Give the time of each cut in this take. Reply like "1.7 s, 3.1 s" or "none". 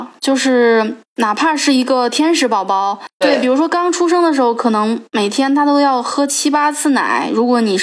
3.2 s